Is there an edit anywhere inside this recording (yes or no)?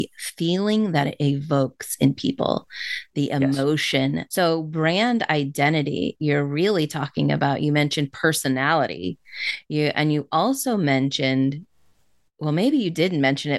yes